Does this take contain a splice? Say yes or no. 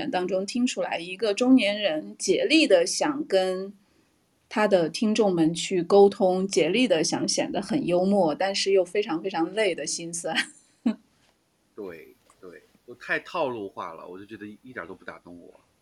no